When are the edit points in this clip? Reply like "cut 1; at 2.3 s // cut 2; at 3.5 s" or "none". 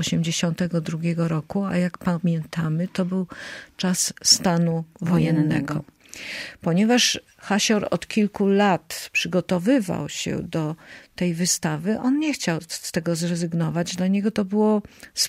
none